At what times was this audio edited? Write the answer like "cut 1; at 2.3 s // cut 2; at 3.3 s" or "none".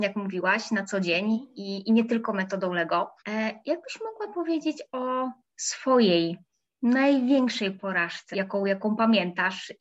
cut 1; at 3.2 s // cut 2; at 8.3 s